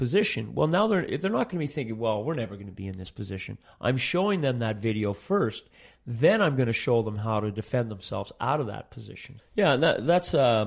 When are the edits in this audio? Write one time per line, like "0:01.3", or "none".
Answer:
0:09.4